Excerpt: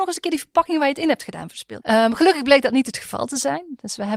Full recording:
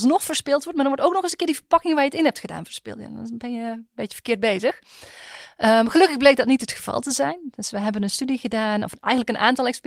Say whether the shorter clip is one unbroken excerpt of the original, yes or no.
no